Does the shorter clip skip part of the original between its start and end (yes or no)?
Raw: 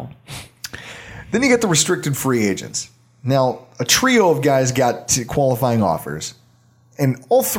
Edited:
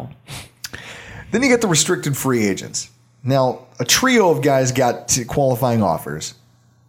no